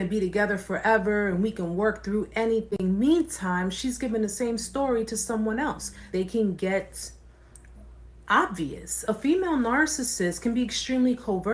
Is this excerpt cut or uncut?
cut